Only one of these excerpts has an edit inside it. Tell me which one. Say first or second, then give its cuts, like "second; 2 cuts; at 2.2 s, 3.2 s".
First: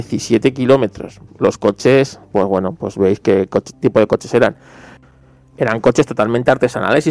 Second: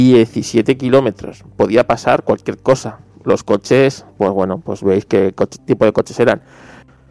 first; 1 cut; at 1.3 s